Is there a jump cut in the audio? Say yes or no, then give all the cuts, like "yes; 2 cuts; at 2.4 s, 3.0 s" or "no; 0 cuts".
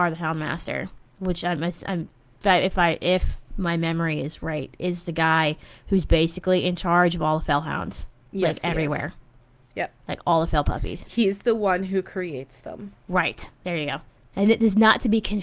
no; 0 cuts